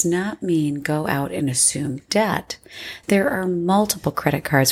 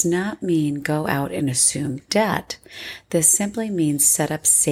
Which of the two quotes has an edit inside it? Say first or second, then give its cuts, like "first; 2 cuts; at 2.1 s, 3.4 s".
first; 1 cut; at 3.0 s